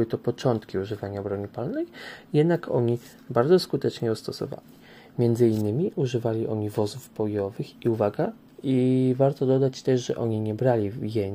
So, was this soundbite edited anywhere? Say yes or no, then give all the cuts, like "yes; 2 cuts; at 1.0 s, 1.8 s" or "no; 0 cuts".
yes; 1 cut; at 8.5 s